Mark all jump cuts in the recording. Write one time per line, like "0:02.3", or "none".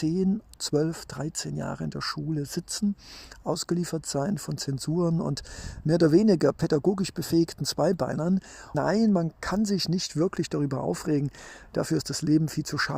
0:08.7